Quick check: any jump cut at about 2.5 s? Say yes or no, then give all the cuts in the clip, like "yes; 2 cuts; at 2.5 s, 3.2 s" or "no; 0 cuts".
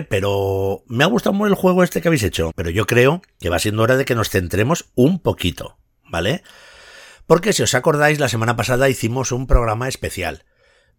yes; 1 cut; at 2.5 s